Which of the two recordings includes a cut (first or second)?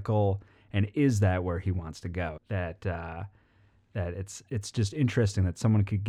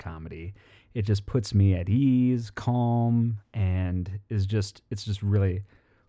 first